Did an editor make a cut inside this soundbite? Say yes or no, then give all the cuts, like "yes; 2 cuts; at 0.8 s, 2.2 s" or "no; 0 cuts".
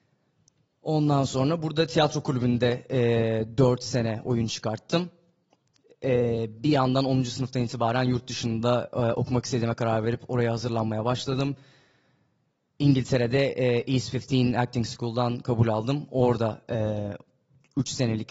no; 0 cuts